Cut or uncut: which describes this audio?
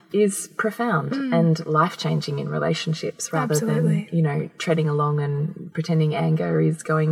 uncut